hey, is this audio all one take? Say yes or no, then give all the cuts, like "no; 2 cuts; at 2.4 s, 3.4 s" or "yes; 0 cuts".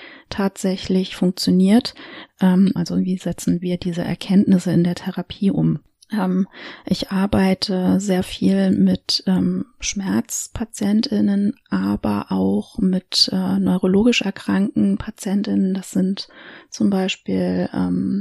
no; 1 cut; at 2.8 s